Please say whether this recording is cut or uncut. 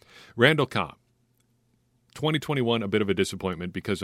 uncut